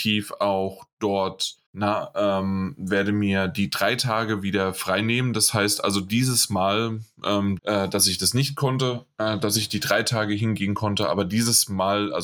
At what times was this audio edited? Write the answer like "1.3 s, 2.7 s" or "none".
1.7 s, 7.6 s